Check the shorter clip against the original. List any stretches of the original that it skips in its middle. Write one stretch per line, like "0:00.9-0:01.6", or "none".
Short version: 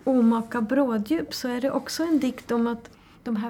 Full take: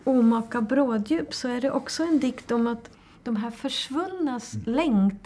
none

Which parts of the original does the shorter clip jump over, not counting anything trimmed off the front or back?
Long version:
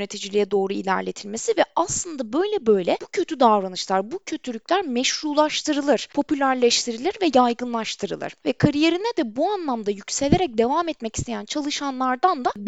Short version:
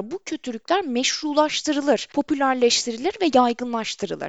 none

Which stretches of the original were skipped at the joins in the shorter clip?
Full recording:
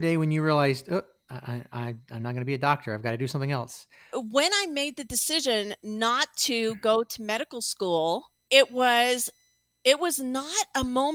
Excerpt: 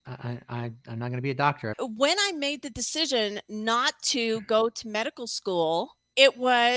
0:03.0-0:04.1

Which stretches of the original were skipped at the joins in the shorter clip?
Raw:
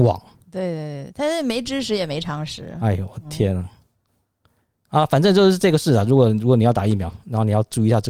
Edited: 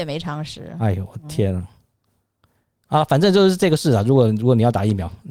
none

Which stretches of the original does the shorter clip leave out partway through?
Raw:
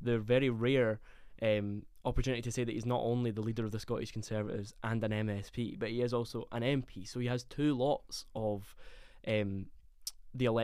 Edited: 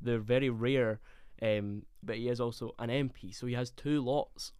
0:02.0-0:05.8

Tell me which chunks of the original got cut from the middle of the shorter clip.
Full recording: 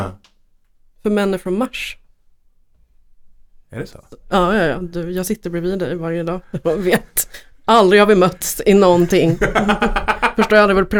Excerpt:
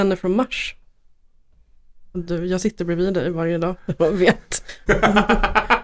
0:03.4-0:04.8
0:07.5-0:09.4

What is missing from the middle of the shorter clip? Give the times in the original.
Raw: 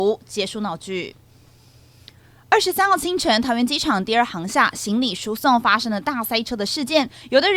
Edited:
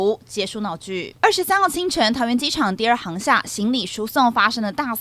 0:01.2-0:02.5

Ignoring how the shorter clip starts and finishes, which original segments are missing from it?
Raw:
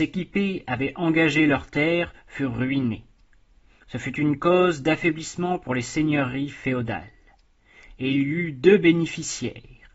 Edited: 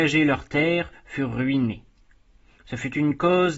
none

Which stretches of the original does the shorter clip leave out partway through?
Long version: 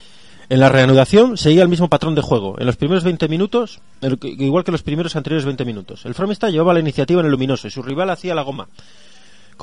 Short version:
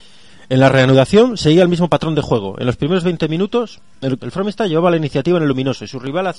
0:04.2-0:06.0

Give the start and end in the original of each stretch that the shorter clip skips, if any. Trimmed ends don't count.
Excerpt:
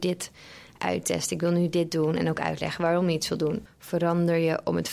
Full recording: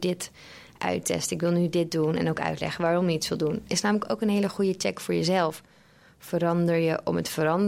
0:03.7-0:06.1

